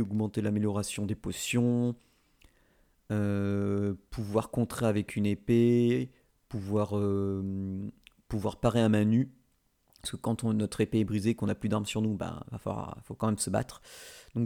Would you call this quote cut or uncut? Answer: uncut